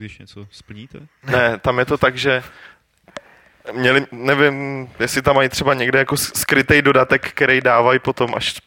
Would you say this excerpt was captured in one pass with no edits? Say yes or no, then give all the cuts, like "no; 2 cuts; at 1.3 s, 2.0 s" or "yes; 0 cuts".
yes; 0 cuts